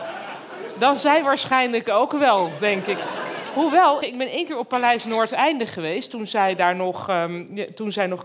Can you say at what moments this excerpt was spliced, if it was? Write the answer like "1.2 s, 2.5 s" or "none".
4.0 s